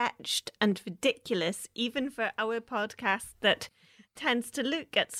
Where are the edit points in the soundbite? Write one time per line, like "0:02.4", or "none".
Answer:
none